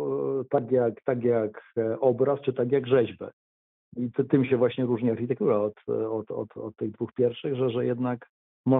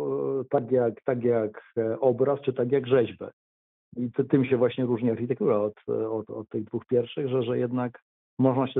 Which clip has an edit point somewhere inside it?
second; 1 cut; at 6.3 s

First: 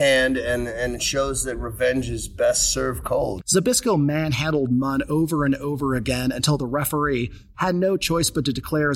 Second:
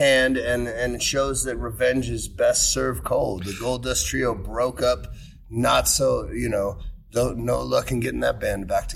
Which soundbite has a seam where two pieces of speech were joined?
first; 2 cuts; at 3.4 s, 7.5 s

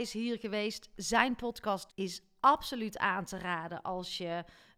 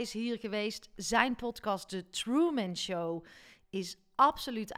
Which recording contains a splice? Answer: first; 1 cut; at 1.9 s

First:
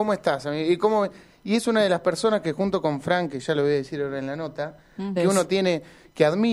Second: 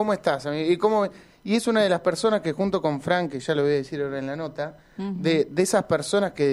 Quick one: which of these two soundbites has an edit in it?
first; 1 cut; at 5.2 s

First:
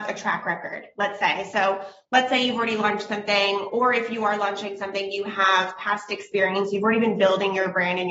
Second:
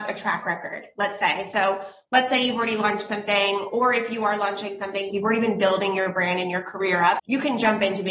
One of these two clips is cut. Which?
second; 2 cuts; at 5.1 s, 7.2 s

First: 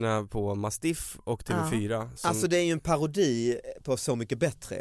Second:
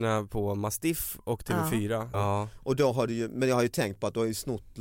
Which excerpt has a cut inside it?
second; 1 cut; at 2.1 s

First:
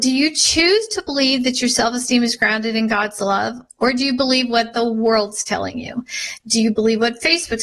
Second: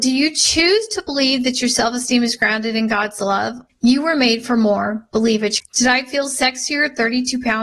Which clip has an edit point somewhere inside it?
second; 2 cuts; at 3.7 s, 5.6 s

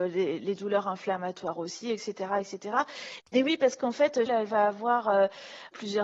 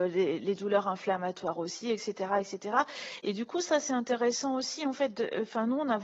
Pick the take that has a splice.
first; 2 cuts; at 3.2 s, 4.3 s

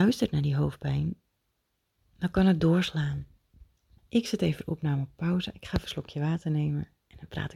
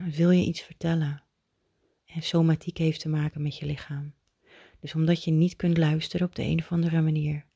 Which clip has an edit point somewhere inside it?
first; 1 cut; at 4.0 s

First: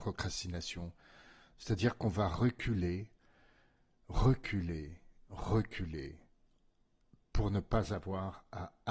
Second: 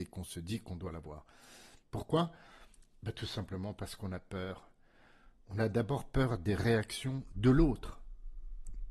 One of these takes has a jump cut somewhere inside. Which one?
second; 1 cut; at 1.8 s

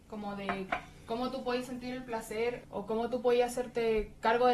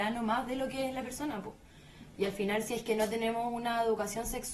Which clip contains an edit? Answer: first; 1 cut; at 2.6 s

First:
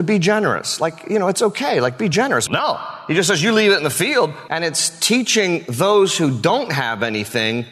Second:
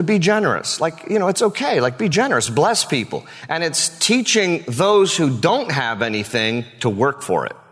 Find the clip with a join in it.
first; 2 cuts; at 2.5 s, 4.5 s

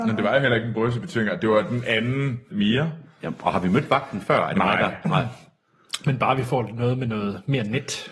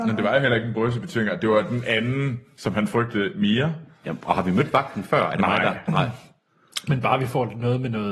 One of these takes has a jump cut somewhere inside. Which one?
first; 1 cut; at 2.5 s

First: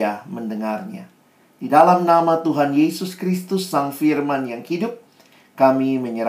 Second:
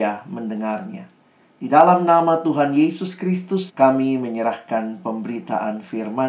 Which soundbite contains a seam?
second; 1 cut; at 3.7 s

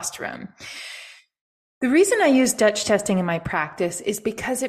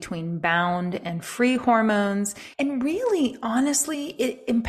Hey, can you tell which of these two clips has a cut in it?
second; 1 cut; at 2.5 s

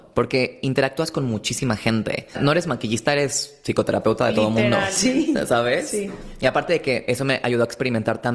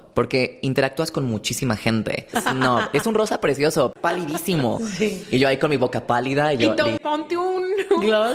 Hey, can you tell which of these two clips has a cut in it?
second; 2 cuts; at 2.3 s, 7.0 s

